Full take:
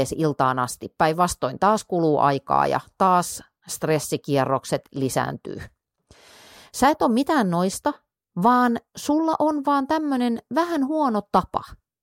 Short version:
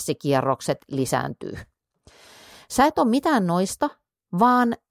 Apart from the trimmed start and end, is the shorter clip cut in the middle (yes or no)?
no